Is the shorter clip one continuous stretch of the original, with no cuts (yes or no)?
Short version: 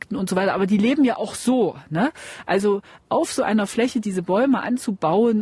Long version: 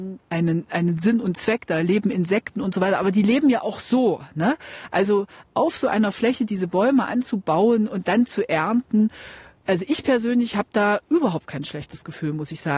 yes